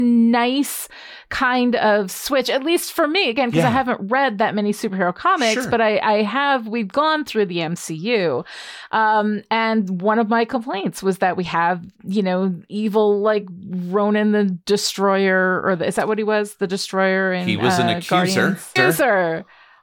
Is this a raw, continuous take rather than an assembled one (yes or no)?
no